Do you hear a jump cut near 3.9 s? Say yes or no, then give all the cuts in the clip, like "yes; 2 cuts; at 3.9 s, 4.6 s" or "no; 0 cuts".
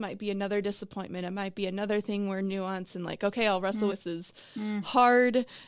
yes; 1 cut; at 3.9 s